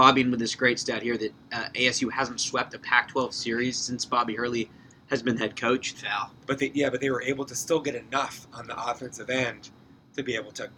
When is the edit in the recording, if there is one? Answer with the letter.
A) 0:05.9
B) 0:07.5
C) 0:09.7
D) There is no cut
A